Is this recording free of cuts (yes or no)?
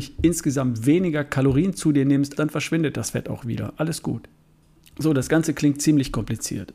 no